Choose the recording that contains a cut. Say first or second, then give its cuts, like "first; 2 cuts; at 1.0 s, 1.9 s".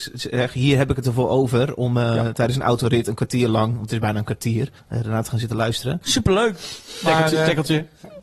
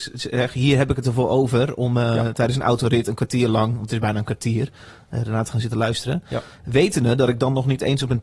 first; 2 cuts; at 4.8 s, 6.0 s